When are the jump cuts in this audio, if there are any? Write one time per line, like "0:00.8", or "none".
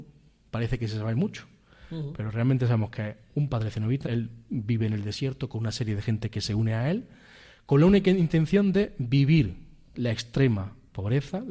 0:04.1